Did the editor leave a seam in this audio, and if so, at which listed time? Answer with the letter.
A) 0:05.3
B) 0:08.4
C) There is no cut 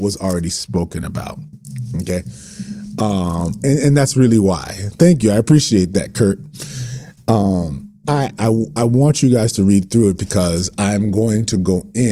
B